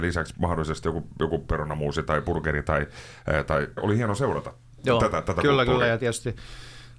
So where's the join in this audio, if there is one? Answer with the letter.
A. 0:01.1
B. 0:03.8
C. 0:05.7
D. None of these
B